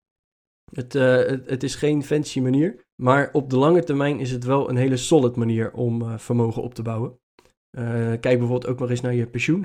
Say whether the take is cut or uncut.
cut